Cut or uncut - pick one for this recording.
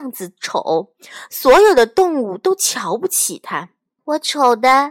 cut